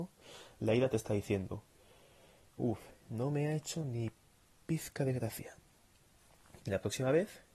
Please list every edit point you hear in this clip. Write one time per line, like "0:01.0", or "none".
0:03.0
0:06.6